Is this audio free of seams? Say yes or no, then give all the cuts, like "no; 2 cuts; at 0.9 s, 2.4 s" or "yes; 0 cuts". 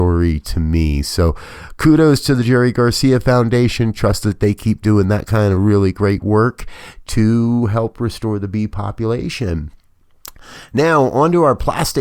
yes; 0 cuts